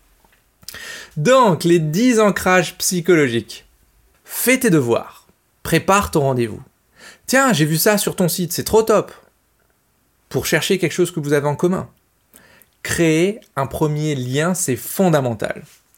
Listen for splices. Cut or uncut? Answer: cut